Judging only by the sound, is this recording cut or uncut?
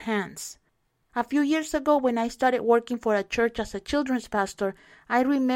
cut